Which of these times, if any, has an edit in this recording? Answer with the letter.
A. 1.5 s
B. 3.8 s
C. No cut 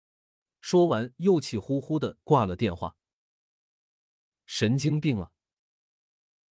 C